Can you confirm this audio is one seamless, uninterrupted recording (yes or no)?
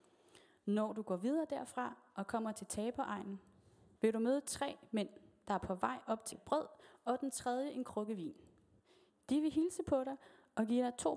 no